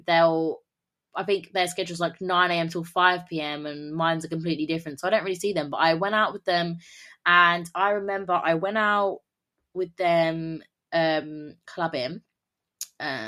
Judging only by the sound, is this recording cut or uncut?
uncut